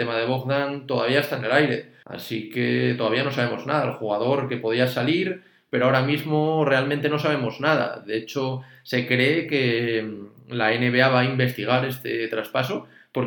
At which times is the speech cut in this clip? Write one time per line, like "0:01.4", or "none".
0:02.0